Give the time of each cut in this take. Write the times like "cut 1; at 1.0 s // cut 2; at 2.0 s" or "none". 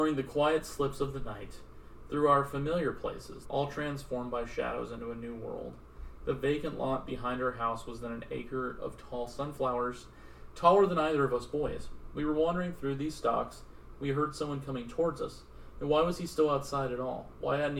cut 1; at 3.4 s // cut 2; at 15.8 s